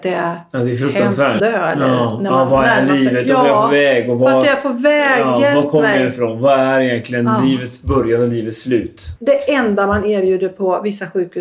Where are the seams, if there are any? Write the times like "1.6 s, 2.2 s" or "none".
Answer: 1.4 s, 9.2 s